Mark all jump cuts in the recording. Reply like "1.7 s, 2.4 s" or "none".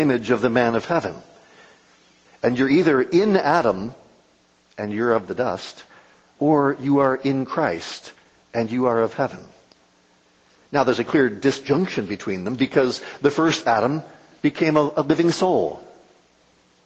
2.2 s